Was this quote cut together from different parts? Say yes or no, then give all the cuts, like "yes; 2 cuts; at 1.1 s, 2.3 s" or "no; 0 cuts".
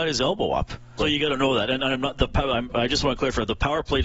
yes; 1 cut; at 1.0 s